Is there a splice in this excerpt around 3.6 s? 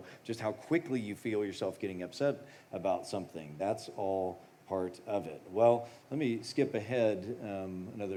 no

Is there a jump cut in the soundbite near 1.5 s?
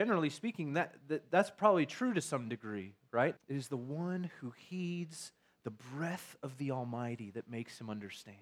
no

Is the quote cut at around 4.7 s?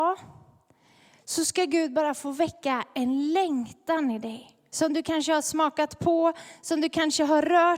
yes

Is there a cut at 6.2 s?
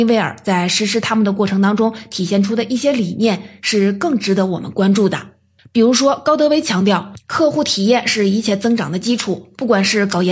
no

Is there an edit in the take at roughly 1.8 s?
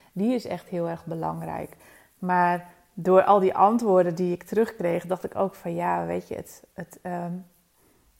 no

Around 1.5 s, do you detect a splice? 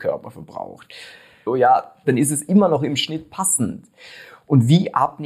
yes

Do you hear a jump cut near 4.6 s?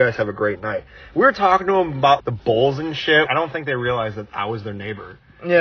no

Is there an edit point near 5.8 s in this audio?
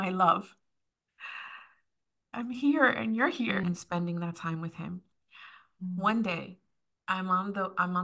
no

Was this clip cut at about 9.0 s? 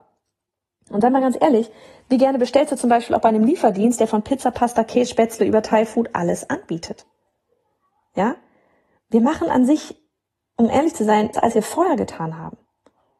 no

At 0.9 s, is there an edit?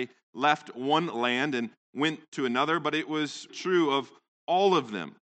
no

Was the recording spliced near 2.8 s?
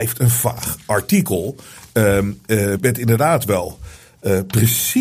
yes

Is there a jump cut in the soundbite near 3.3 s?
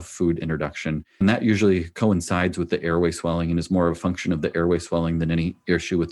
no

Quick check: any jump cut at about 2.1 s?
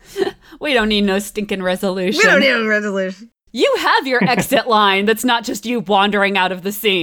no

